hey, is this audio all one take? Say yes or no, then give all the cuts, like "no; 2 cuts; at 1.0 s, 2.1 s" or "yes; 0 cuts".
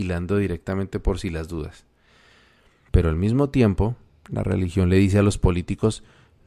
no; 1 cut; at 2.9 s